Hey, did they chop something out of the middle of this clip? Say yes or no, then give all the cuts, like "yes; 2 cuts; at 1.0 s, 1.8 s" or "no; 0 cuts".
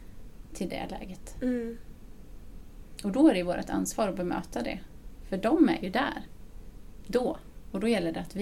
no; 0 cuts